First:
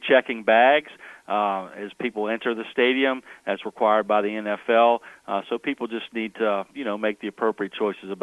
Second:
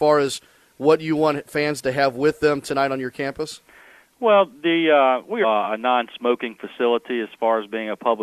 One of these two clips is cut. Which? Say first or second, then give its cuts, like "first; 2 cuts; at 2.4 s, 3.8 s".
second; 1 cut; at 5.4 s